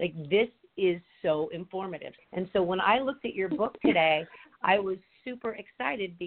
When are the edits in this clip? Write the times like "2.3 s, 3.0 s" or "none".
2.2 s, 5.2 s